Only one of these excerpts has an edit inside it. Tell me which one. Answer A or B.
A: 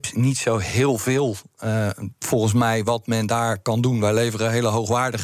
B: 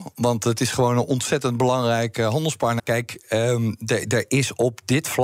B